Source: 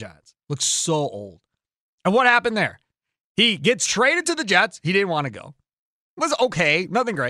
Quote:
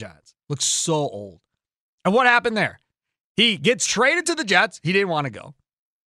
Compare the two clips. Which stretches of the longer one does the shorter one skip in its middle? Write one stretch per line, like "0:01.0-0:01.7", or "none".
none